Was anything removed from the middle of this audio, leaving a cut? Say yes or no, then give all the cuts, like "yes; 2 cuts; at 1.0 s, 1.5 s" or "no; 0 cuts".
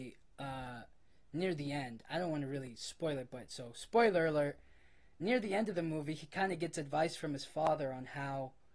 no; 0 cuts